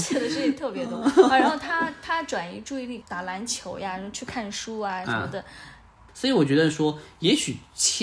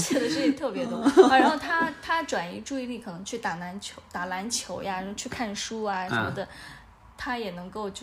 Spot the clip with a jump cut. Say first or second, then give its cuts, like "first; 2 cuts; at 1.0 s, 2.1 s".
first; 2 cuts; at 3.0 s, 6.1 s